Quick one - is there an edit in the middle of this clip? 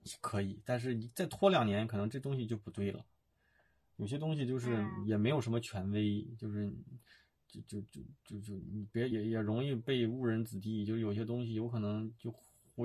yes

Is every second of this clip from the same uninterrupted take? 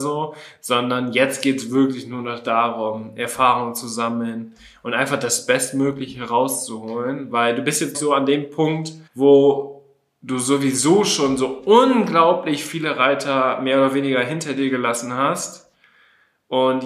no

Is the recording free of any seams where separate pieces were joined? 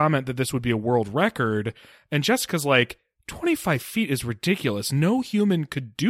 yes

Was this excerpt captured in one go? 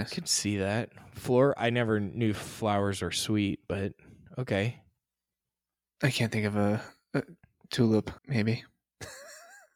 no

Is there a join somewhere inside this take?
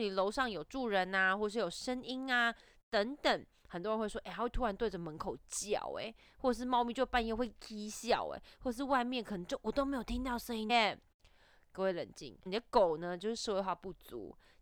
yes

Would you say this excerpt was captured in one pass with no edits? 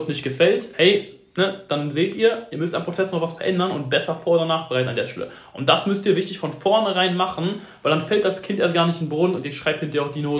yes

